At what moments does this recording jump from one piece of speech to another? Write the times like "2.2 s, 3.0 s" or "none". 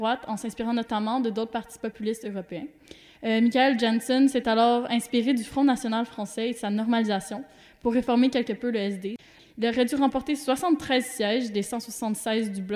9.4 s